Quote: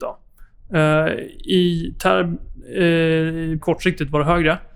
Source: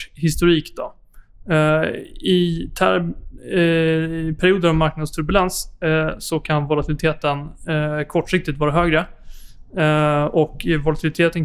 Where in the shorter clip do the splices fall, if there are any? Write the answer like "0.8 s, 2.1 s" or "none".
3.6 s

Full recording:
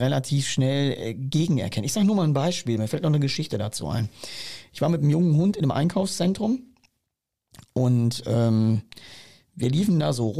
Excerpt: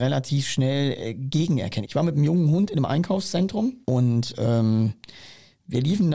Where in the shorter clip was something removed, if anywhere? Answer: 1.8 s, 3.8 s

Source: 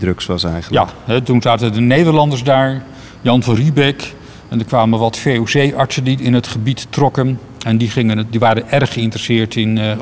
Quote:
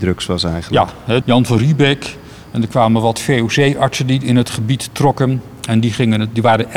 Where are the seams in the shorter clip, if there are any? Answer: 1.2 s

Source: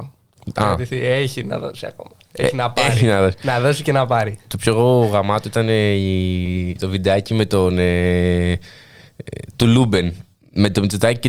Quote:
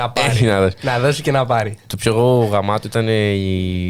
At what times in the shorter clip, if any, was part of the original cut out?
none

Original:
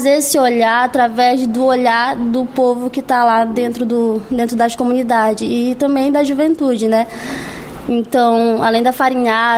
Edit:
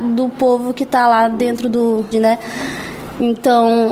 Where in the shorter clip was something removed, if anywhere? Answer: 2.1 s

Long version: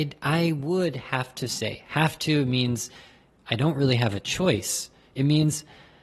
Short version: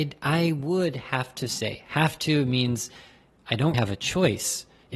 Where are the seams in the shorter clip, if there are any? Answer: 3.7 s

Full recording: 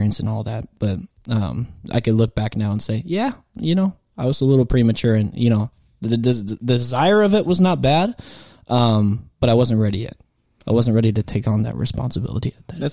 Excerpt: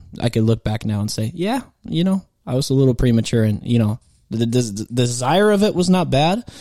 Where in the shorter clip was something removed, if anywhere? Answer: none

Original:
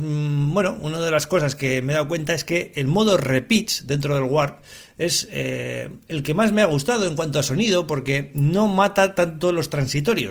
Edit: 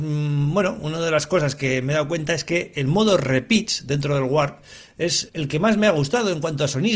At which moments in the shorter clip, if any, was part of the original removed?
5.3 s

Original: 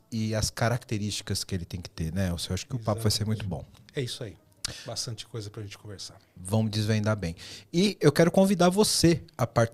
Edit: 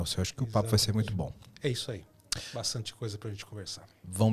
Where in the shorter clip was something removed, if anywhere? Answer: none

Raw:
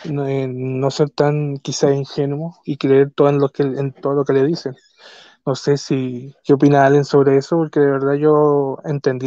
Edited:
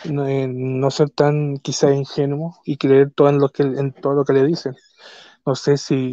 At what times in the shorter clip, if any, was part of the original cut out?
none

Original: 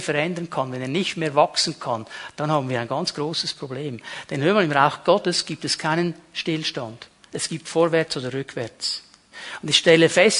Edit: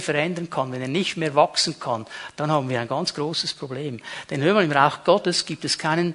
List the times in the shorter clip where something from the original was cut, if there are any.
none

